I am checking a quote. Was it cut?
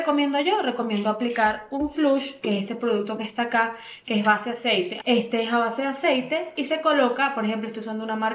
yes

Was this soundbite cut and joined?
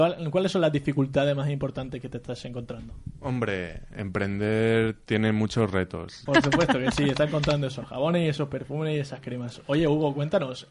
yes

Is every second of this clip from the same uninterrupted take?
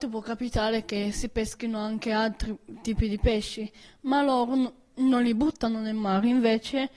yes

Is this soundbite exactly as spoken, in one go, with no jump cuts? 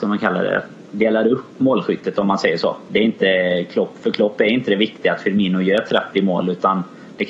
yes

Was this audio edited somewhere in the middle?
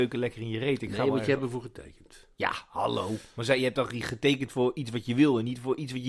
no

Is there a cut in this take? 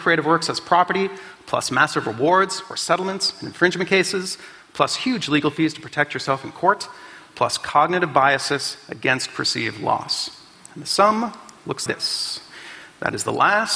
yes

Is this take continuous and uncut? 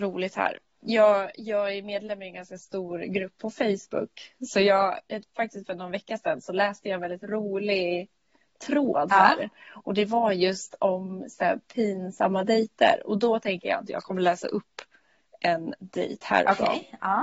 yes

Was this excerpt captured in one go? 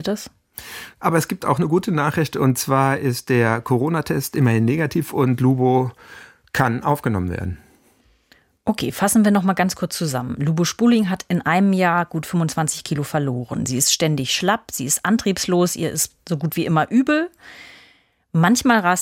no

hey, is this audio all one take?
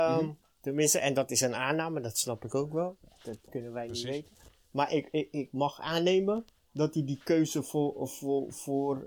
yes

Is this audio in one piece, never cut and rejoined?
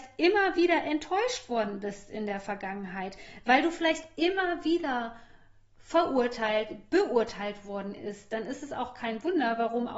yes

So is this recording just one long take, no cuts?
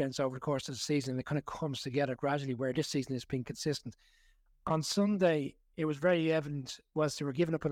yes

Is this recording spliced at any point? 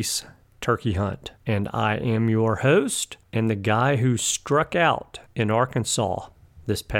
no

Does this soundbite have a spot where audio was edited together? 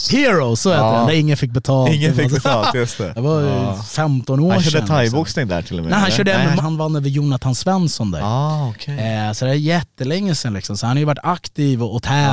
yes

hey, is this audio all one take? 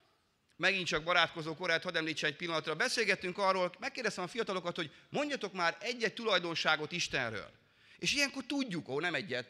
yes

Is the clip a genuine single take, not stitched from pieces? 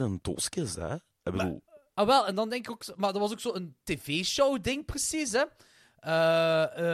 no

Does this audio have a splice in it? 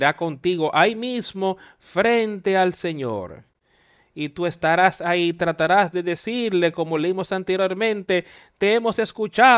no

